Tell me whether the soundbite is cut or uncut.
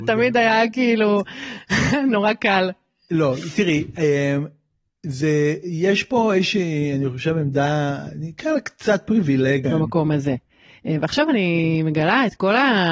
cut